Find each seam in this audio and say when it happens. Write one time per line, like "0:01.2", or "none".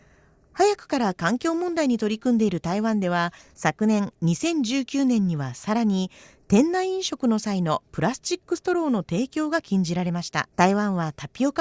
0:10.5